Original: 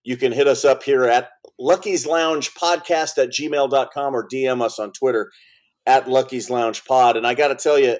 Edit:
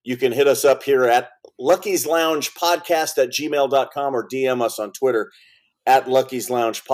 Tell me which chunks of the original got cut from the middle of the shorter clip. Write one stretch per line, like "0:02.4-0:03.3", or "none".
none